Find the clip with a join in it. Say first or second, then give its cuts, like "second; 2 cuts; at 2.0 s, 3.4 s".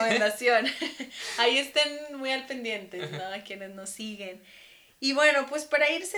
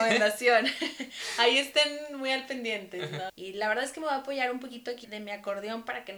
second; 2 cuts; at 3.3 s, 5.0 s